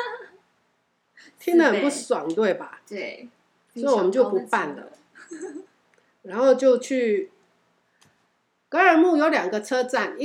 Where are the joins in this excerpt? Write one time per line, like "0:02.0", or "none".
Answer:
none